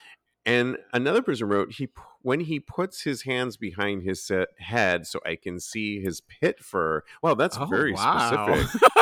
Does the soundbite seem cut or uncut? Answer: uncut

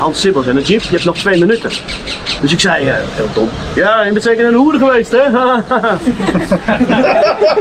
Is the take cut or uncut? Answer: cut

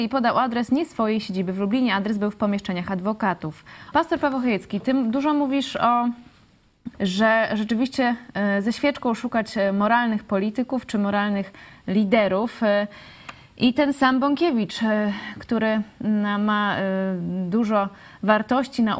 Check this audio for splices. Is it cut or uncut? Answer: cut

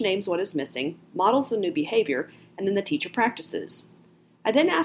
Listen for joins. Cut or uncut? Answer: uncut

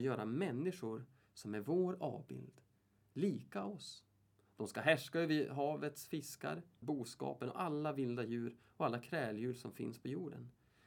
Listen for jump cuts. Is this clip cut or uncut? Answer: cut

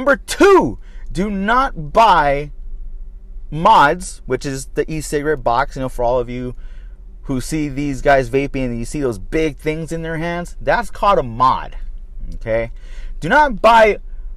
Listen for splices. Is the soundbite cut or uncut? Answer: uncut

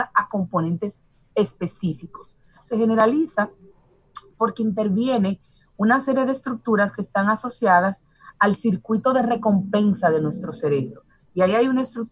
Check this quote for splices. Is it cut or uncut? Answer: cut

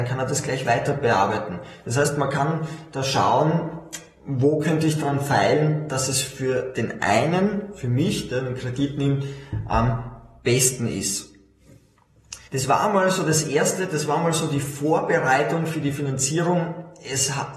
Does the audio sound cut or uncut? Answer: cut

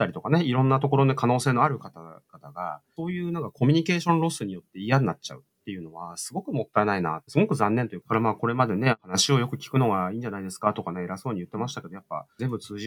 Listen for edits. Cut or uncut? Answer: cut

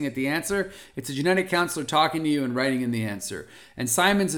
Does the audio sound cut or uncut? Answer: uncut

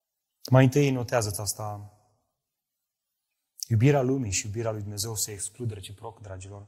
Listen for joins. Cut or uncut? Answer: uncut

